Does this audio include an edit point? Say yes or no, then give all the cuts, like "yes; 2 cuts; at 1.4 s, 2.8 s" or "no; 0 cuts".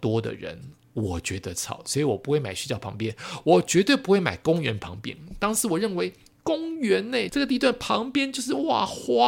yes; 1 cut; at 7.3 s